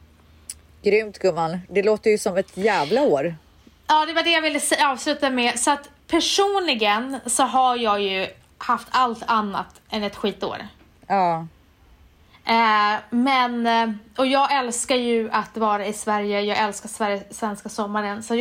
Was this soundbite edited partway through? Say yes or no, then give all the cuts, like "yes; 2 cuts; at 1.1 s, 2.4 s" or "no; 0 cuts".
no; 0 cuts